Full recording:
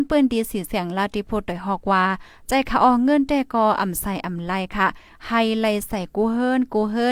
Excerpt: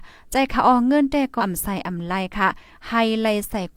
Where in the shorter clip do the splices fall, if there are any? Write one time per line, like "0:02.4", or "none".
0:01.4